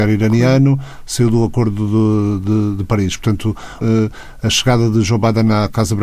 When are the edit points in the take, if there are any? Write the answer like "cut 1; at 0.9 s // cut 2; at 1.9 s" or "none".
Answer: cut 1; at 3.8 s